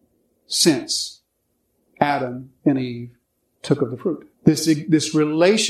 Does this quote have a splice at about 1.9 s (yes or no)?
no